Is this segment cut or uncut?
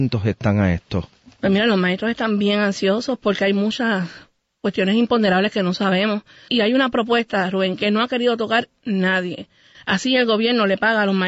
cut